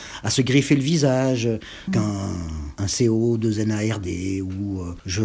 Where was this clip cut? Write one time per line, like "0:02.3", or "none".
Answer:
0:01.9